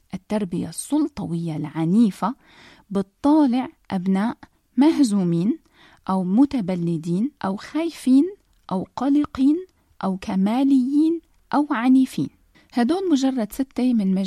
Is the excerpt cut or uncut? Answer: cut